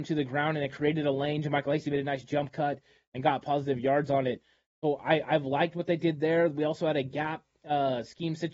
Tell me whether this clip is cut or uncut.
uncut